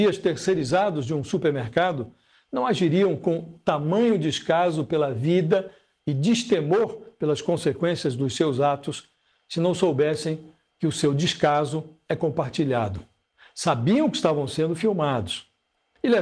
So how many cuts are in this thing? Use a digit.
0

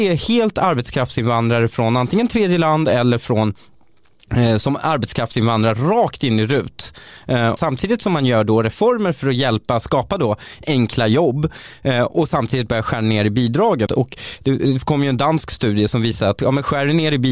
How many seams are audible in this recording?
2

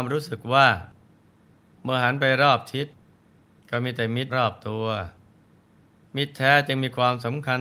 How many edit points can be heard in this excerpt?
1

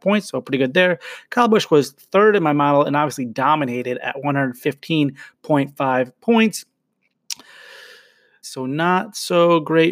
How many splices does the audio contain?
1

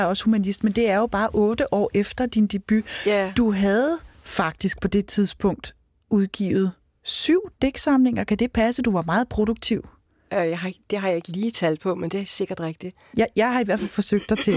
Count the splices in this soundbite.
0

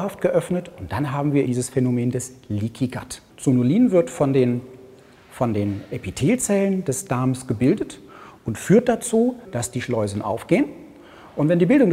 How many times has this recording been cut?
3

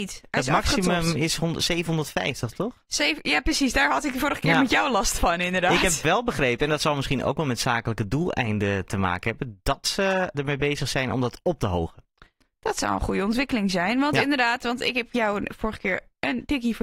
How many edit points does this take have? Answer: 1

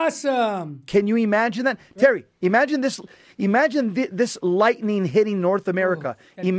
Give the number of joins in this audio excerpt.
0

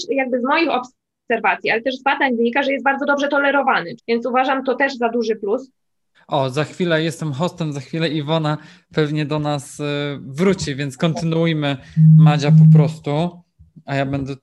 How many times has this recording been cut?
2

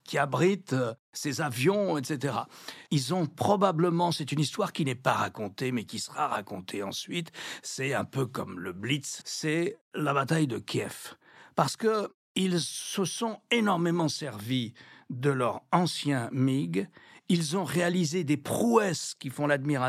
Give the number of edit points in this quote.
2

